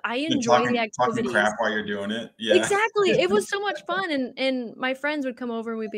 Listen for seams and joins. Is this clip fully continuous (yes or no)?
yes